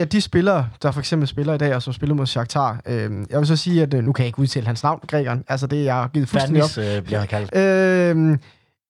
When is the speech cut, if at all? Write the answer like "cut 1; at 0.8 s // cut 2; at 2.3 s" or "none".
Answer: cut 1; at 7.5 s